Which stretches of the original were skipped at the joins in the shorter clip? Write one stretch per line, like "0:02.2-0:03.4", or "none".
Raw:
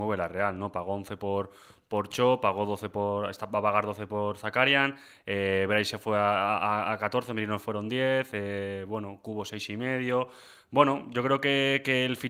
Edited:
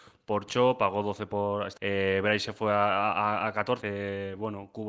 0:03.4-0:05.2
0:07.3-0:08.3